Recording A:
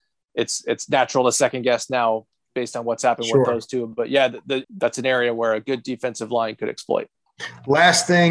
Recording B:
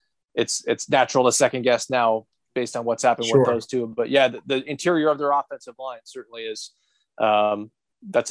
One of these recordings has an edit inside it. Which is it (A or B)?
A